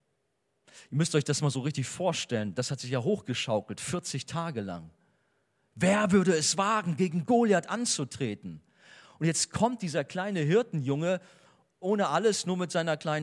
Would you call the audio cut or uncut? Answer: cut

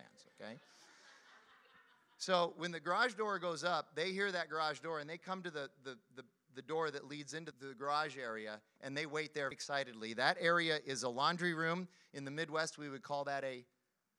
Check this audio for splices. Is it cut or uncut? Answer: cut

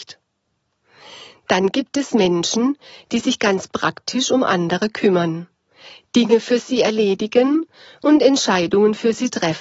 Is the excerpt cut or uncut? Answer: uncut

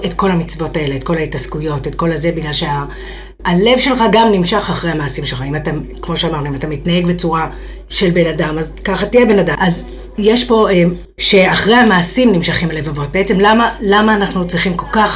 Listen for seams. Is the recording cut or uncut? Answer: cut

